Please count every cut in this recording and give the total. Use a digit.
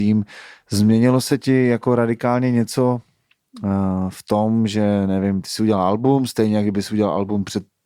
0